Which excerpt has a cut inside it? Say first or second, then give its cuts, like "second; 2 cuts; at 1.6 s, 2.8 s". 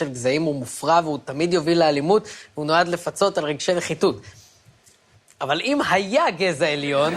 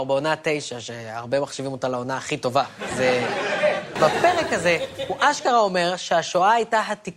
second; 1 cut; at 4.0 s